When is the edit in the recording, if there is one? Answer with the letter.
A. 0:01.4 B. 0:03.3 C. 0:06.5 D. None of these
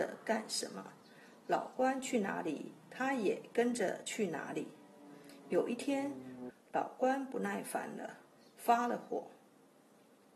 C